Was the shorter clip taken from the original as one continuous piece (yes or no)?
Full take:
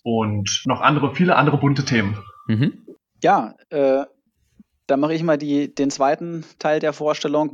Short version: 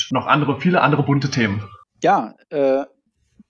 no